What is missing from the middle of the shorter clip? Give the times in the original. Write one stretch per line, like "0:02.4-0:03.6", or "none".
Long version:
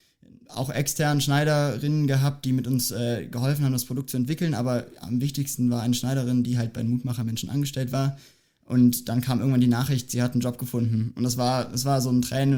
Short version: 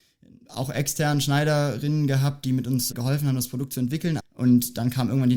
0:02.9-0:03.3
0:04.6-0:08.5